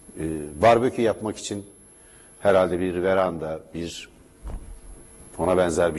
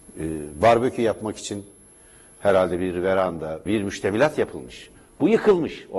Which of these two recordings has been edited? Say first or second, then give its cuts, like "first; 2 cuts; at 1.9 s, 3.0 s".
second; 1 cut; at 3.7 s